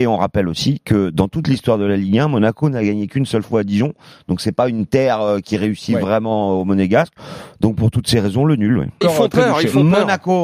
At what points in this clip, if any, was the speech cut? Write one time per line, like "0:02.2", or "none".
0:09.0